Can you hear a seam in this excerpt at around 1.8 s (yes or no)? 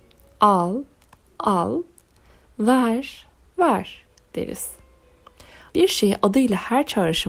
no